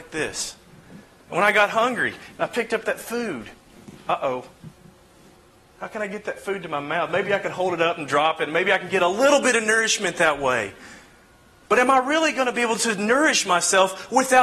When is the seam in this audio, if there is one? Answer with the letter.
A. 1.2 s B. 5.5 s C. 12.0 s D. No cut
D